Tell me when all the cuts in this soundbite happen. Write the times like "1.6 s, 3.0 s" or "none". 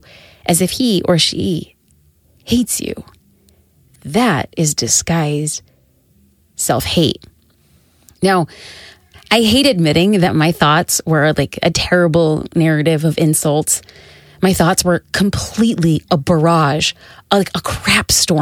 none